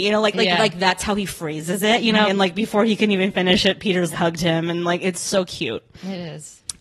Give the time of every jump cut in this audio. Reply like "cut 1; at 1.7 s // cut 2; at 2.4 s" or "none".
cut 1; at 2.2 s // cut 2; at 4.1 s

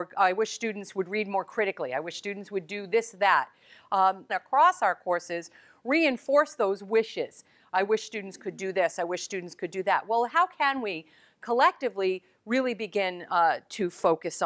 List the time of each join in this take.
cut 1; at 4.3 s

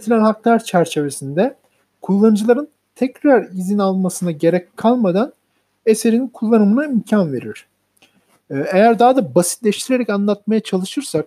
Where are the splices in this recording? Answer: none

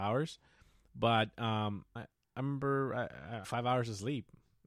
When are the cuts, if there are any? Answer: cut 1; at 2.0 s // cut 2; at 3.4 s

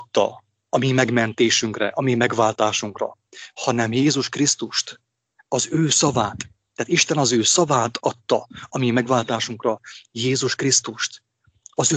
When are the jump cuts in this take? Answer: none

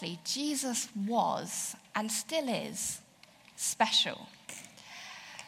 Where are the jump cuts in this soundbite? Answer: none

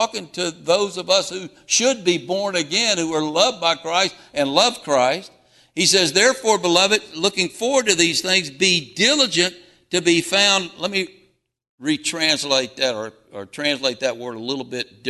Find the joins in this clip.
none

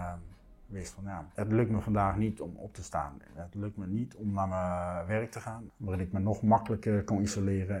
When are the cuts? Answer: cut 1; at 5.7 s

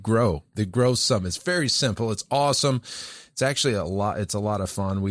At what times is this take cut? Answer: none

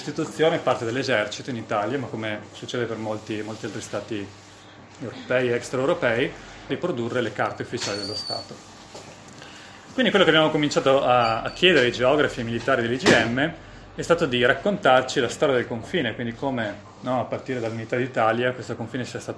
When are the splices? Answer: cut 1; at 6.7 s

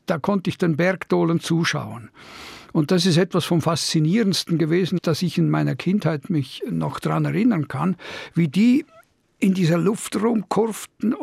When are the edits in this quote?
none

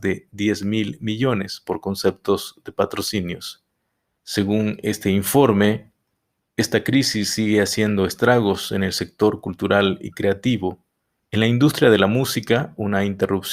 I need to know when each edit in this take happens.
cut 1; at 4.2 s // cut 2; at 11.2 s

